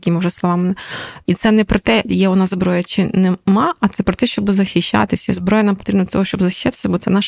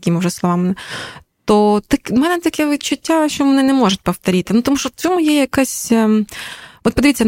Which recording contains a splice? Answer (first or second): first